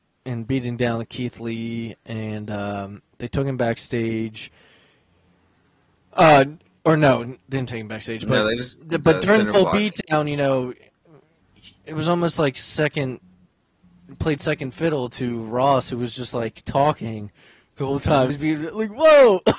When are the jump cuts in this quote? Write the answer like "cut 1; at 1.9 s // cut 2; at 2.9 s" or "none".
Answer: cut 1; at 11.8 s // cut 2; at 18.3 s